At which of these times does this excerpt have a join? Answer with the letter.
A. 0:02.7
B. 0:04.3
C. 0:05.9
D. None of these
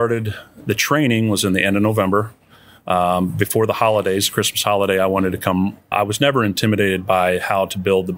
C